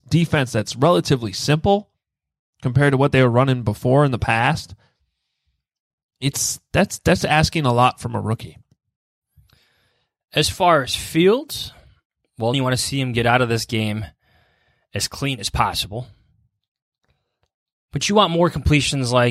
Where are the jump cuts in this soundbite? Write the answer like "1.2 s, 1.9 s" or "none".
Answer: 12.5 s

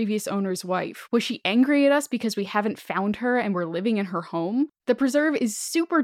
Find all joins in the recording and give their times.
4.8 s

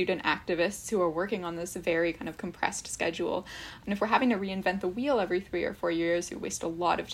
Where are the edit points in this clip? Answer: none

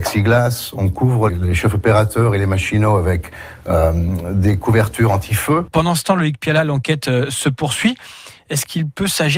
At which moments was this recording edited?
1.3 s, 5.7 s

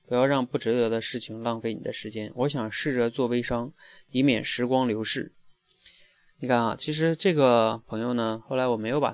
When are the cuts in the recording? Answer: 5.3 s

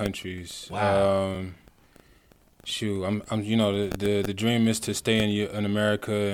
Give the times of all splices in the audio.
none

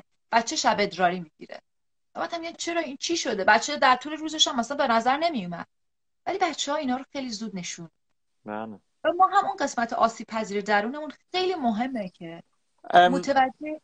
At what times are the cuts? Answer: 2.5 s

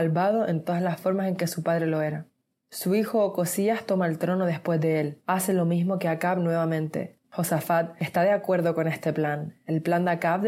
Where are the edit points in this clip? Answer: 7.2 s

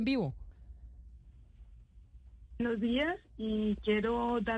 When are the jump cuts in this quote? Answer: none

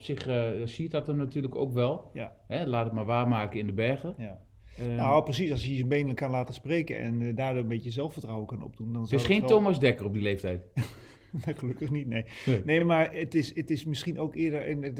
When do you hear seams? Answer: none

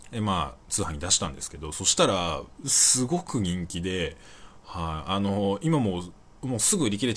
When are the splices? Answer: none

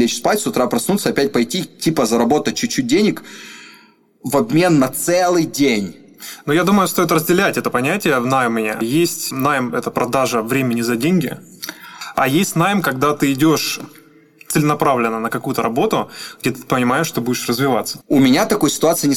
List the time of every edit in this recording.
9.9 s, 18.0 s

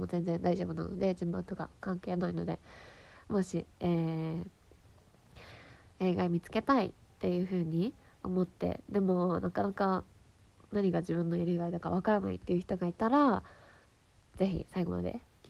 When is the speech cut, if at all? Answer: none

